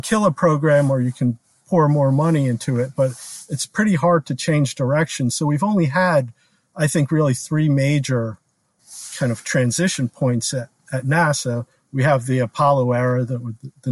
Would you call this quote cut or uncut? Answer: uncut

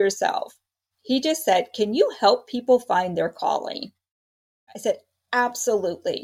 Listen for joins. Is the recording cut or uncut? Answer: cut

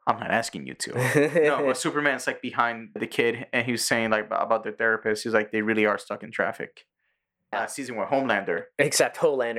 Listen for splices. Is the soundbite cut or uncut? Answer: cut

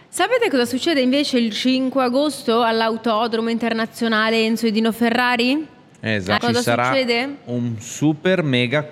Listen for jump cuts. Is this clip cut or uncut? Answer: cut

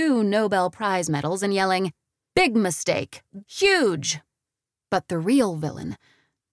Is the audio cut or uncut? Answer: cut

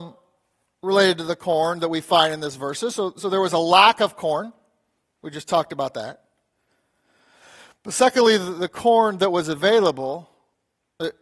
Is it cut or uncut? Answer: uncut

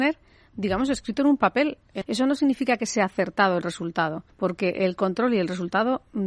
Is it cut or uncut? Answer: cut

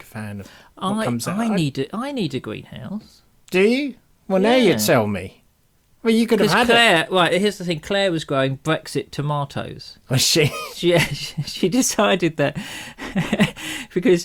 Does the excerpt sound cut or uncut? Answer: uncut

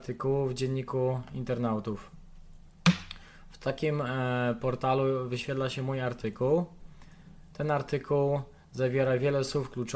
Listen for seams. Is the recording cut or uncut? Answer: uncut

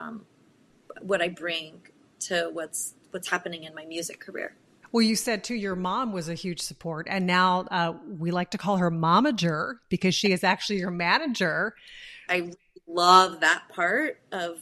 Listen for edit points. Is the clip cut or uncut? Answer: cut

